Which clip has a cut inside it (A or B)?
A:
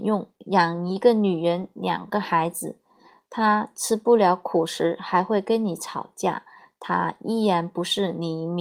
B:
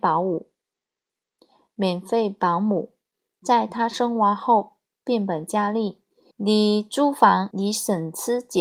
B